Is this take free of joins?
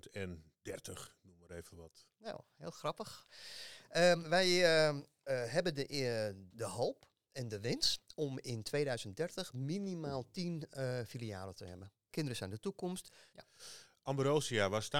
no; 3 cuts; at 6.5 s, 12.1 s, 13.3 s

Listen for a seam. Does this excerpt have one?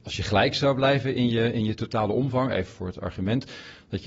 yes; 1 cut; at 2.7 s

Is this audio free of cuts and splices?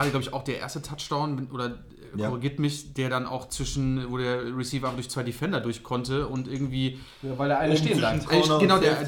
yes; 0 cuts

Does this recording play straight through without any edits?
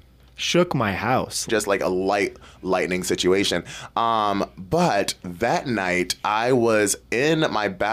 no; 1 cut; at 1.5 s

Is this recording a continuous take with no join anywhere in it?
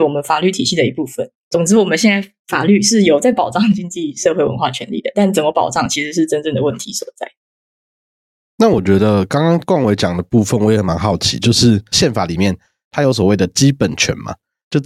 yes; 0 cuts

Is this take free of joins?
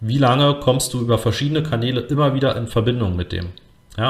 yes; 0 cuts

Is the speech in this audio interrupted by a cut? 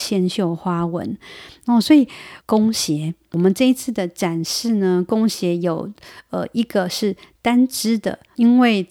yes; 1 cut; at 2.4 s

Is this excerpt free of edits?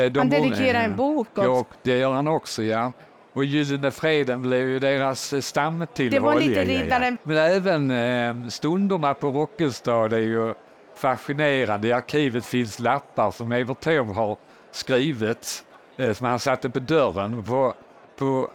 no; 1 cut; at 7.2 s

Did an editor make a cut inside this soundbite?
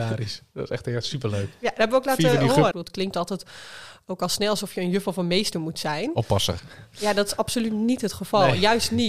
yes; 1 cut; at 2.7 s

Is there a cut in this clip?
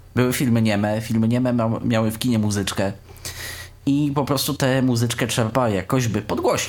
no; 0 cuts

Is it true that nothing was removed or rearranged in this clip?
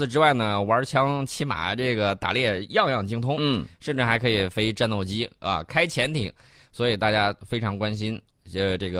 yes; 0 cuts

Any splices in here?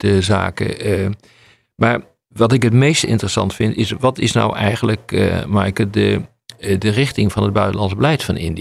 no; 0 cuts

